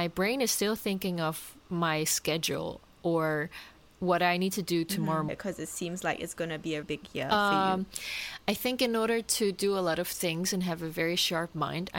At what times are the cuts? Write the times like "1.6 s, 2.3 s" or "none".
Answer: 1.6 s, 5.3 s, 6.8 s